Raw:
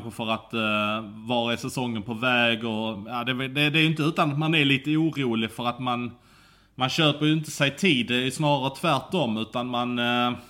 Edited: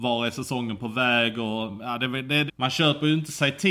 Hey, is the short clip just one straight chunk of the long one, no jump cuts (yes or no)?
no